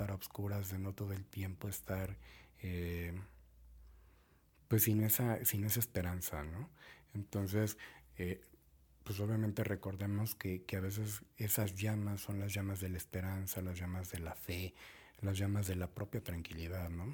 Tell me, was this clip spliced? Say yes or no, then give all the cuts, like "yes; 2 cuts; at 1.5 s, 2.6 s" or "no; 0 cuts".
no; 0 cuts